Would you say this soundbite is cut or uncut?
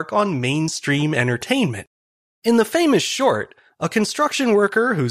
cut